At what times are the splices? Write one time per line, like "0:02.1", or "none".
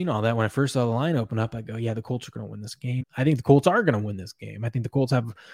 0:03.0